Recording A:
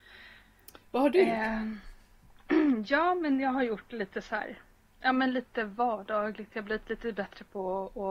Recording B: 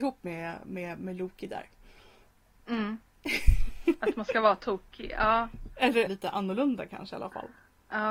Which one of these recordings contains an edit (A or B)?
B